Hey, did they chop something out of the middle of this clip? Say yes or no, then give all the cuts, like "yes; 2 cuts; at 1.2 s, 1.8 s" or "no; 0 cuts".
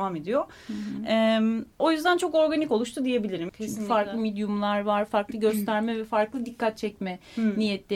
yes; 2 cuts; at 1.7 s, 3.5 s